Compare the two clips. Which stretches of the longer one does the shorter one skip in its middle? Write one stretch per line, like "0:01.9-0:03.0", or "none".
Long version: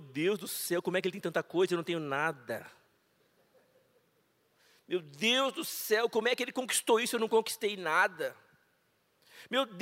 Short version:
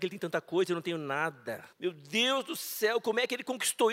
0:02.7-0:04.8